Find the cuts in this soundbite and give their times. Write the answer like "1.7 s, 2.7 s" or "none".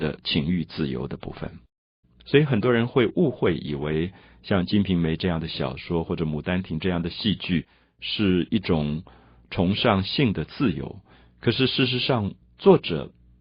2.0 s, 12.4 s